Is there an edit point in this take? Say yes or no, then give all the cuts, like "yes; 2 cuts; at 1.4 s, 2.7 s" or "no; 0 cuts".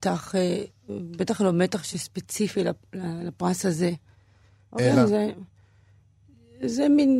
no; 0 cuts